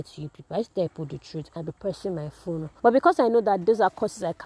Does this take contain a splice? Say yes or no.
yes